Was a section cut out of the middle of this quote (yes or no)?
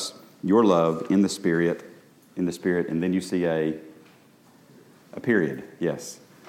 no